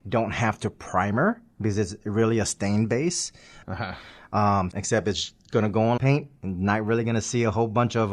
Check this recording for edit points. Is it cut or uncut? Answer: cut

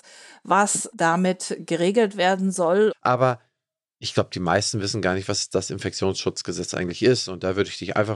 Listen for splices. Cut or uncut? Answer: cut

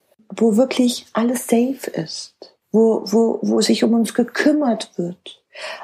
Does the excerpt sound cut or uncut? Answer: cut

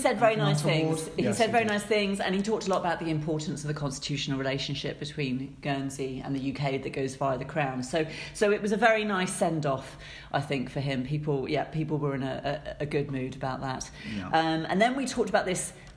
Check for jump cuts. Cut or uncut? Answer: uncut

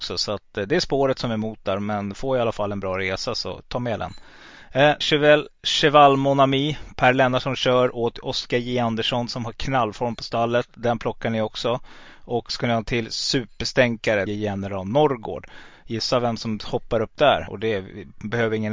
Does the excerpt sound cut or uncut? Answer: cut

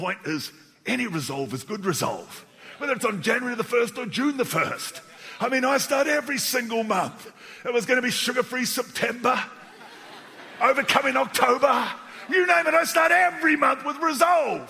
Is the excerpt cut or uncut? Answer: uncut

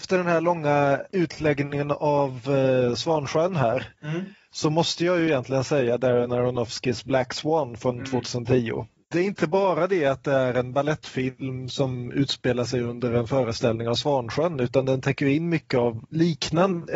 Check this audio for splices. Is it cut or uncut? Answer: uncut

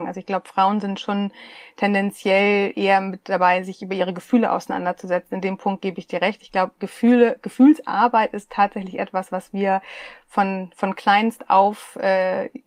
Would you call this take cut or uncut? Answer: uncut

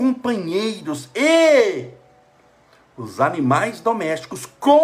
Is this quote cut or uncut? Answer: uncut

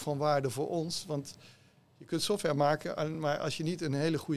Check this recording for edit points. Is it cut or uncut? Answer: uncut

